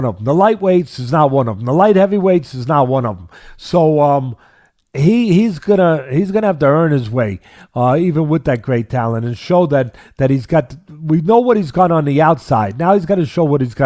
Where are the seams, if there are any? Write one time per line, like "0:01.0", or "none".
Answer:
none